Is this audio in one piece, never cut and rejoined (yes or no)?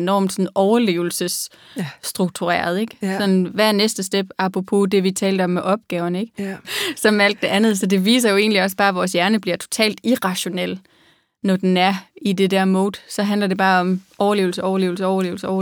no